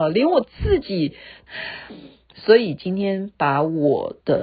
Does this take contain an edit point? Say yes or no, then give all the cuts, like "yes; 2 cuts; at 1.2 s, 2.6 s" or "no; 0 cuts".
yes; 1 cut; at 1.5 s